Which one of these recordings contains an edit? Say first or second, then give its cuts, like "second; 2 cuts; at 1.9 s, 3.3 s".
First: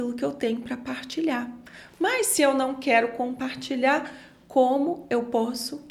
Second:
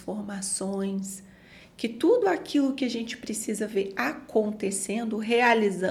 second; 1 cut; at 1.6 s